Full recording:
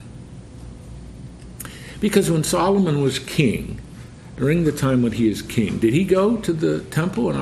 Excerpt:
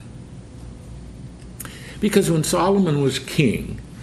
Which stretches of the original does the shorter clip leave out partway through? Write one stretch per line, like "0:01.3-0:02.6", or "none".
none